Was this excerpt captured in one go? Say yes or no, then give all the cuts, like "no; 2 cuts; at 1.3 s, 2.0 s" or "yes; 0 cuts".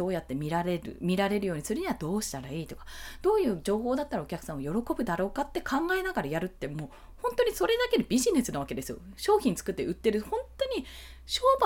yes; 0 cuts